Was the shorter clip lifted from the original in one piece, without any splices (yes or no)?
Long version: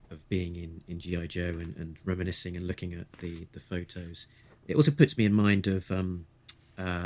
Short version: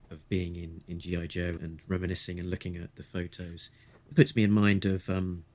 no